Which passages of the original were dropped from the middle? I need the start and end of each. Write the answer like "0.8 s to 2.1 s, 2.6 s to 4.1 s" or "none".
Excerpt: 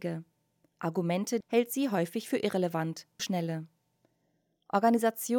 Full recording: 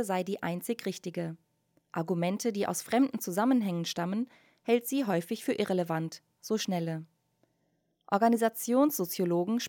2.5 s to 4.6 s, 6.4 s to 6.6 s